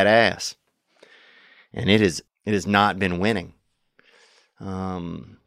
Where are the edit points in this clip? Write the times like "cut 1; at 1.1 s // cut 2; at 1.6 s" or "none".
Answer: cut 1; at 2.3 s